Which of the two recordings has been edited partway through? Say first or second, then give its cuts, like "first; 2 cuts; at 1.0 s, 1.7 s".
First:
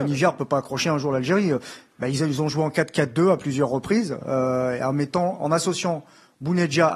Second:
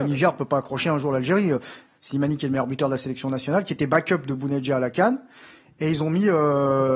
second; 1 cut; at 1.9 s